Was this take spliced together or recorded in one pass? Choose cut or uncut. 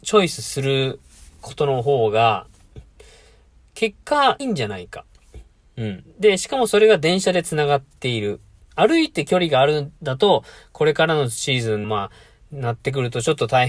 cut